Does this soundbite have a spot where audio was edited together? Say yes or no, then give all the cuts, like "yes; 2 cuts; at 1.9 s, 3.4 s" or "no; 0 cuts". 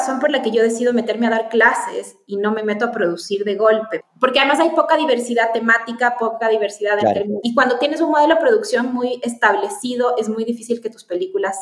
yes; 1 cut; at 7.4 s